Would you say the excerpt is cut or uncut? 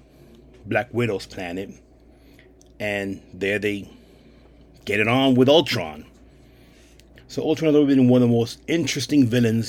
cut